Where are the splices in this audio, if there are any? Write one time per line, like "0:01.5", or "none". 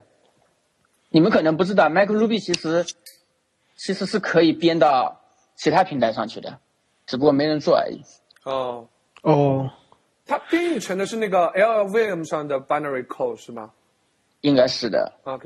none